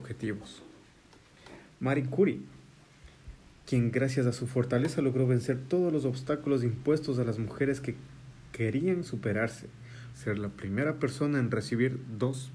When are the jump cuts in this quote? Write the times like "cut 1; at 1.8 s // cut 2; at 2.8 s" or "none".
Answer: cut 1; at 10.1 s